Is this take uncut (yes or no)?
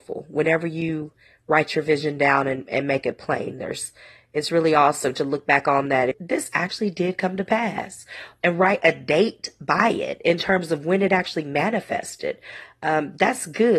no